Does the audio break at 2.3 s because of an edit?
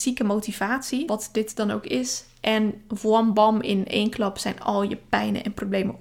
no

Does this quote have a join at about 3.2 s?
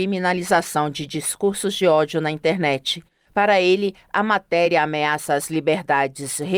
no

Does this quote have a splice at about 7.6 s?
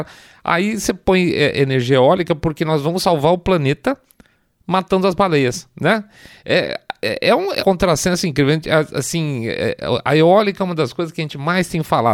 yes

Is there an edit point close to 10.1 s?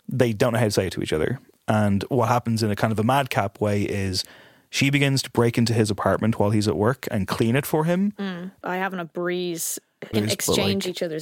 yes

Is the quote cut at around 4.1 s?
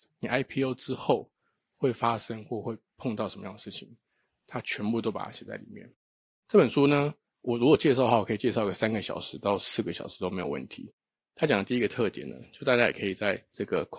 no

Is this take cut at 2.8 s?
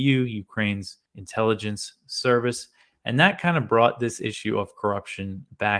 no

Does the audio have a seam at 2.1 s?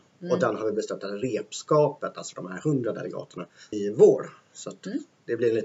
no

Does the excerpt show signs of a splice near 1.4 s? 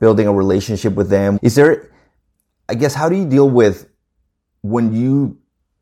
yes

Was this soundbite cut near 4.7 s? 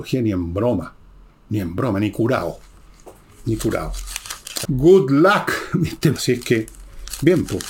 yes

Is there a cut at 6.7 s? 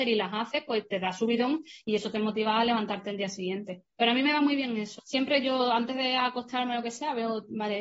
no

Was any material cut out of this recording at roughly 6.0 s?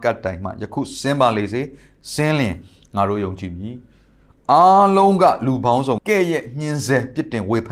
yes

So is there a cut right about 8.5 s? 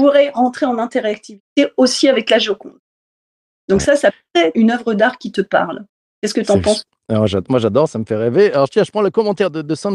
no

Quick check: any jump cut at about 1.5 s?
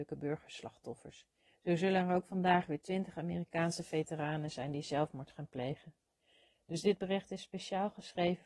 yes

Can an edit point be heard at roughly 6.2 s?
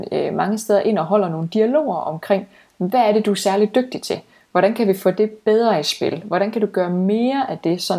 no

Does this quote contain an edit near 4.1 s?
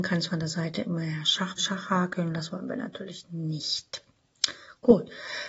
no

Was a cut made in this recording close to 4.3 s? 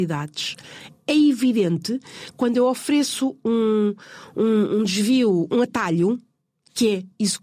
no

